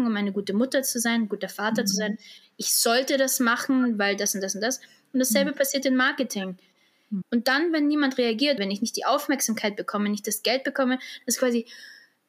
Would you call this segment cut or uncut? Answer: cut